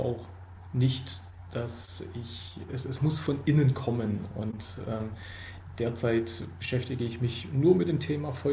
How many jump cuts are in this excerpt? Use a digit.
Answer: 1